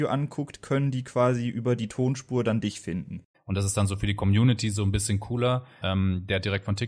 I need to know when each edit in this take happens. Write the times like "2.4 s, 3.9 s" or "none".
3.3 s, 5.8 s